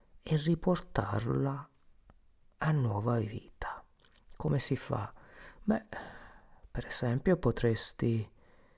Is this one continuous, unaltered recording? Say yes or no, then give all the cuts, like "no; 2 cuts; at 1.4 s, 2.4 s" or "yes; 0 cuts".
yes; 0 cuts